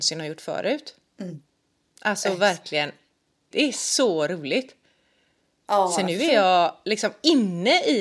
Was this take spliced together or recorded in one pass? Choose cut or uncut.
cut